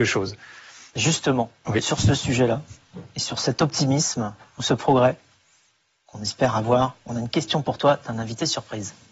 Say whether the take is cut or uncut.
uncut